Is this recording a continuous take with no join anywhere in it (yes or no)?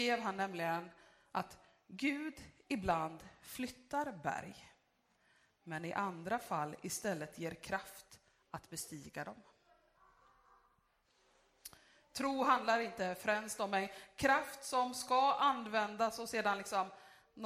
yes